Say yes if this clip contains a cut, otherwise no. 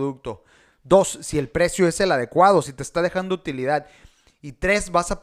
yes